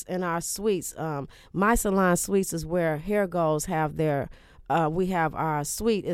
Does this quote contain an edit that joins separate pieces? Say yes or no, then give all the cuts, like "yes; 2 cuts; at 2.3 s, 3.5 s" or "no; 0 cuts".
no; 0 cuts